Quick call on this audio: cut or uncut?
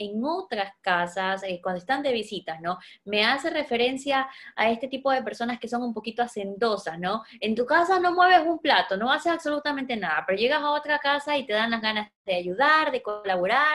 uncut